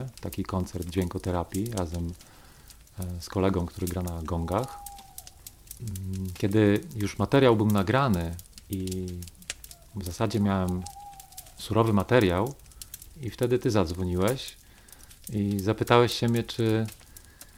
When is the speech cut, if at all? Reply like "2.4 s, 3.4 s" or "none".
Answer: 13.2 s